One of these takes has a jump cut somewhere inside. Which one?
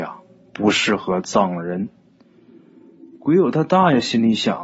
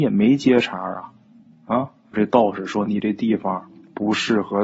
second; 1 cut; at 2.1 s

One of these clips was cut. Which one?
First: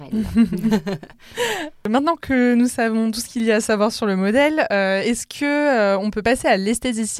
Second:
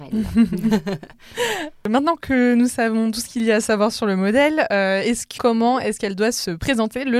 second; 1 cut; at 5.4 s

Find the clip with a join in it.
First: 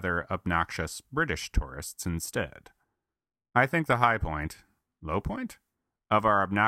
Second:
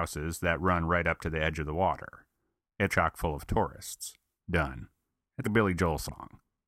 second; 3 cuts; at 2.9 s, 4.4 s, 5.4 s

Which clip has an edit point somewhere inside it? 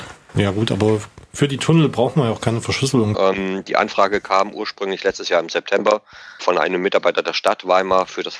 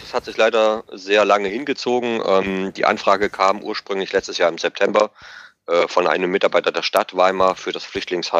first; 2 cuts; at 3.1 s, 6.4 s

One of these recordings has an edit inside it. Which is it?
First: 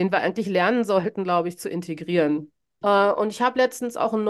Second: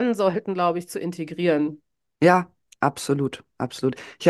first; 1 cut; at 2.8 s

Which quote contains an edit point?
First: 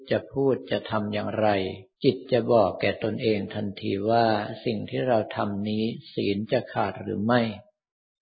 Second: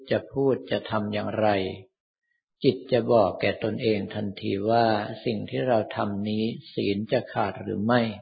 first; 1 cut; at 1.9 s

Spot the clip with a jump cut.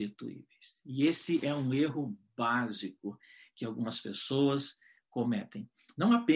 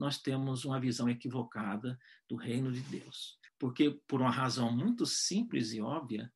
second; 1 cut; at 3.5 s

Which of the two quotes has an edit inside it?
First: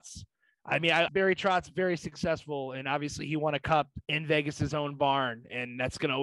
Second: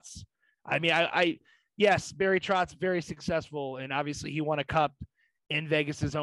first; 2 cuts; at 1.1 s, 4.0 s

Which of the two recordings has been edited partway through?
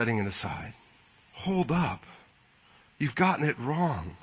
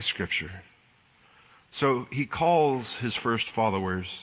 first; 1 cut; at 1.2 s

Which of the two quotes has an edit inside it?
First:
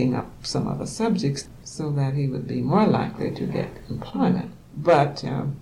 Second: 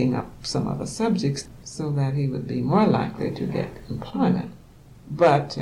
first; 1 cut; at 4.6 s

